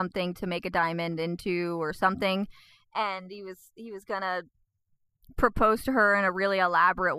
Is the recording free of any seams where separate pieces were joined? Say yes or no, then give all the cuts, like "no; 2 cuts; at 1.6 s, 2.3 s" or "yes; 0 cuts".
yes; 0 cuts